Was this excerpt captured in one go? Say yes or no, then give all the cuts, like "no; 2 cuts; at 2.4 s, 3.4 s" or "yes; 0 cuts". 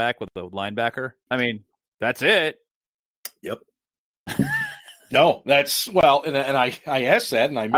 no; 1 cut; at 1.3 s